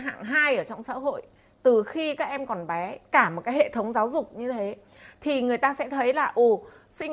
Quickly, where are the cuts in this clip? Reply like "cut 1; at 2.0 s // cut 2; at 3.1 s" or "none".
none